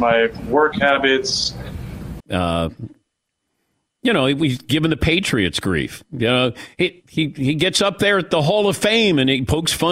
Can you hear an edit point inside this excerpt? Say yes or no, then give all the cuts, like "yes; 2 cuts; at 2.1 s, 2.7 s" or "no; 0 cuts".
yes; 1 cut; at 2.2 s